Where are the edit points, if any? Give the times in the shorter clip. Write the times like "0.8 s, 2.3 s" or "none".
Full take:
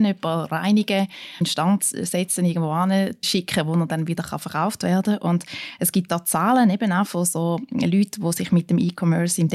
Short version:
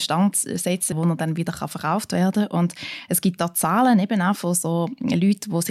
0.9 s